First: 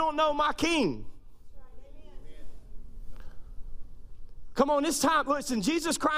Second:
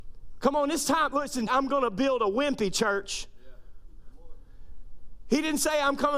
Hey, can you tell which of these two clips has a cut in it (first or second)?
second